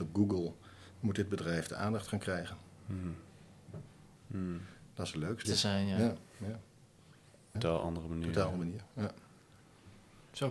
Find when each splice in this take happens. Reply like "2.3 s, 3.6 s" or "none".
4.2 s, 5.4 s, 7.5 s